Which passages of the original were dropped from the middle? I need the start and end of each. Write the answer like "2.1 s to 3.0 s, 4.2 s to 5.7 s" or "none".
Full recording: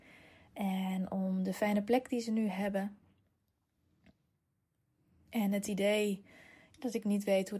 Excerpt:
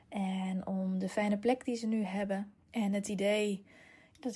3.1 s to 5.2 s